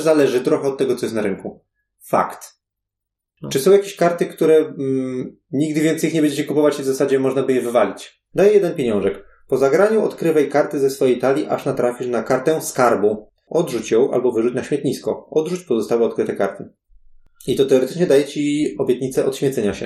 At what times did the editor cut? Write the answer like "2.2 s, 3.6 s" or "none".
8.3 s